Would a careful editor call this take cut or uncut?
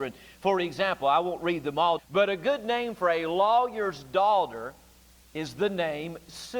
cut